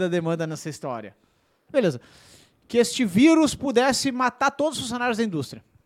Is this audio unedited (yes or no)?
no